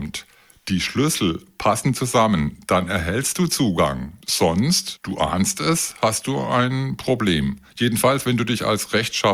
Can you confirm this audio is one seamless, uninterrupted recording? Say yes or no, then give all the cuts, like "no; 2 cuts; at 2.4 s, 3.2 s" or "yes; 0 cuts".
yes; 0 cuts